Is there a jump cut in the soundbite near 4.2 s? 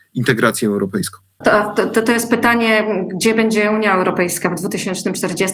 no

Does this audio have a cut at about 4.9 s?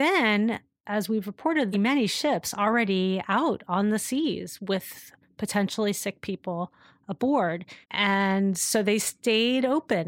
no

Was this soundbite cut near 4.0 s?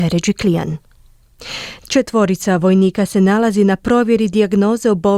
no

